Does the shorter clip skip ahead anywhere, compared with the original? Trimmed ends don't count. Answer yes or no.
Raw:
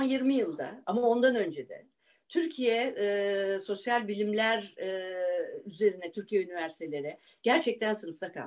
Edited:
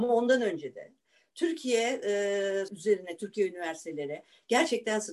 yes